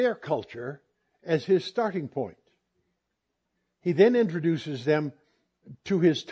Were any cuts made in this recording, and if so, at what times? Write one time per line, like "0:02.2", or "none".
none